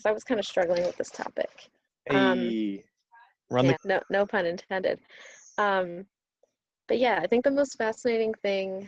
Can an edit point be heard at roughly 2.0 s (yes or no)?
no